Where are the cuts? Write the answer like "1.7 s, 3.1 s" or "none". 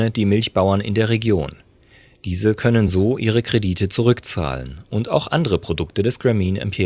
none